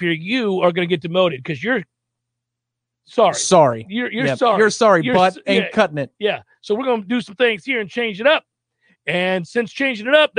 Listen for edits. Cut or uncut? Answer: uncut